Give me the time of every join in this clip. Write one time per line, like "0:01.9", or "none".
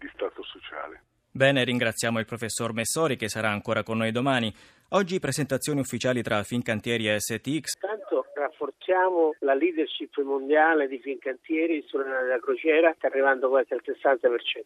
0:07.7
0:13.0